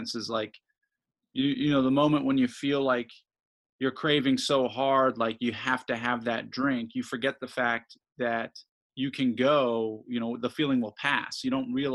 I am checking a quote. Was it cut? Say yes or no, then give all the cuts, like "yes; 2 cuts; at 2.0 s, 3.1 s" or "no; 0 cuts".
no; 0 cuts